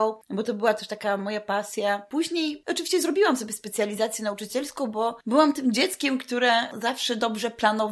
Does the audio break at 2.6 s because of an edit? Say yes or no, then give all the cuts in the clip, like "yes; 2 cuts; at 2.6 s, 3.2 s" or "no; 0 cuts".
yes; 1 cut; at 2.6 s